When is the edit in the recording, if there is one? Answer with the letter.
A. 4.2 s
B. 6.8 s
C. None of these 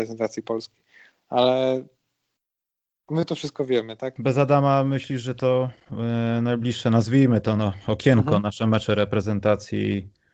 A